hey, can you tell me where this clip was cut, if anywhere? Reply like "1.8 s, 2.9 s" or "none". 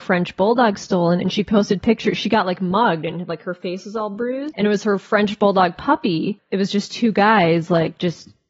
4.5 s